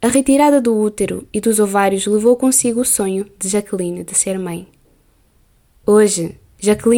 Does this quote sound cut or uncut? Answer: cut